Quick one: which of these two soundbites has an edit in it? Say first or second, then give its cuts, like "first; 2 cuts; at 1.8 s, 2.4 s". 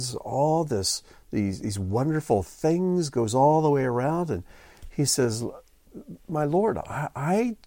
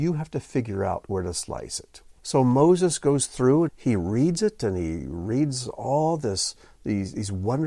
second; 2 cuts; at 2.2 s, 3.7 s